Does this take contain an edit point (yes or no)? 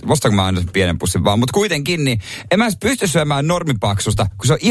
no